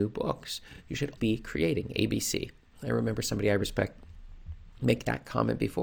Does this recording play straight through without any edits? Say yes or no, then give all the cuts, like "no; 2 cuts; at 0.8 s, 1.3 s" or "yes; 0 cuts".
no; 1 cut; at 1.2 s